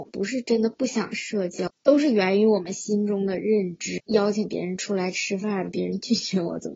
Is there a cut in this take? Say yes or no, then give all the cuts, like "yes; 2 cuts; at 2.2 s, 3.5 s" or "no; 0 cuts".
yes; 1 cut; at 4.0 s